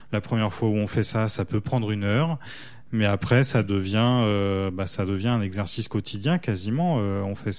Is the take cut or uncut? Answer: uncut